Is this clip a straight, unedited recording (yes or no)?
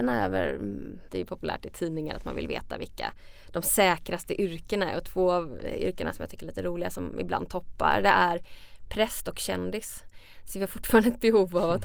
no